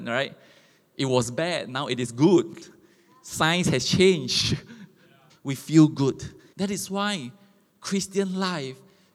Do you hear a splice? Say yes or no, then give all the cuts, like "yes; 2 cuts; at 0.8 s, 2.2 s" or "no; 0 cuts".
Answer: yes; 2 cuts; at 5.3 s, 6.5 s